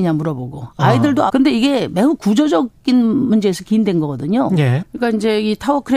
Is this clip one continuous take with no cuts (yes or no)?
no